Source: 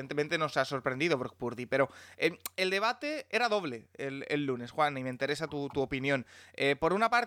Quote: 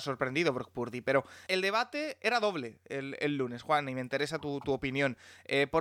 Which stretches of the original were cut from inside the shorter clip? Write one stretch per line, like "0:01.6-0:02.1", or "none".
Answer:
0:02.1-0:02.6